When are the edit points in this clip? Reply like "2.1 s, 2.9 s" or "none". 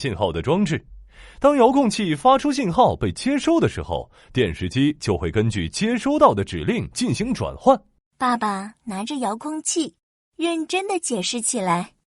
8.0 s